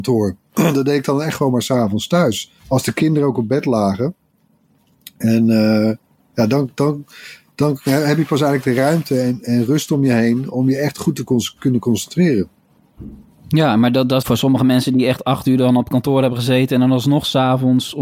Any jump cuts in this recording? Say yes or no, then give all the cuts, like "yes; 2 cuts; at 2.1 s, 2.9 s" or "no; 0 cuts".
yes; 2 cuts; at 2.6 s, 14.2 s